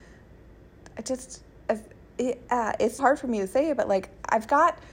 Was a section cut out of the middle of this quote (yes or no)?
yes